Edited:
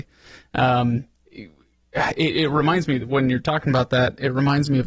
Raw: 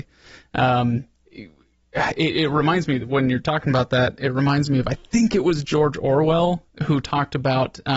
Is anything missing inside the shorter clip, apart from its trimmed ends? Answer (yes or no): no